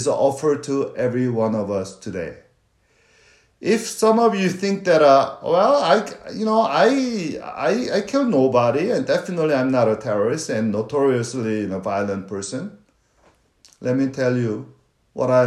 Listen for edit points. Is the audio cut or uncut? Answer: uncut